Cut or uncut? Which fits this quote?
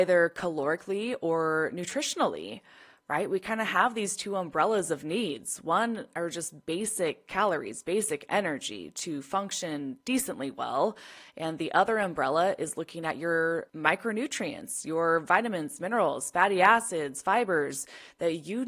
uncut